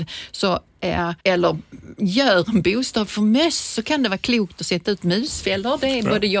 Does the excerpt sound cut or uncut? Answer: cut